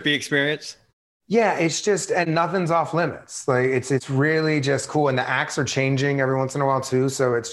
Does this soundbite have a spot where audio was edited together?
no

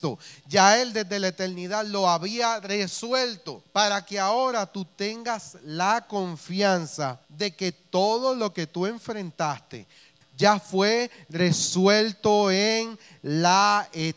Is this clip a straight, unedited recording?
no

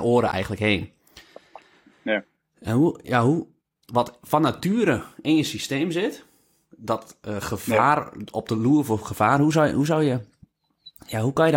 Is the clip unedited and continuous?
no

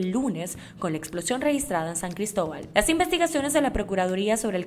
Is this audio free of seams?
no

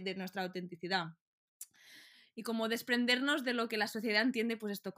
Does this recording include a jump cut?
no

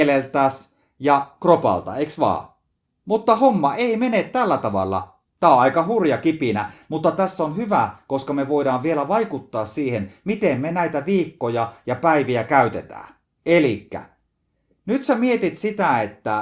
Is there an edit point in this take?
yes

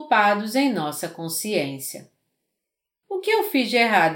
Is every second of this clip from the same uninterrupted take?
no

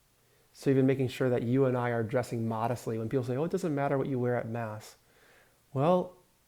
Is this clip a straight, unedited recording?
yes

